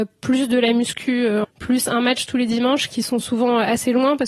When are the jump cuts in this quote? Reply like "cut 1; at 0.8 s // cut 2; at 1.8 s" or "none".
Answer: cut 1; at 1.4 s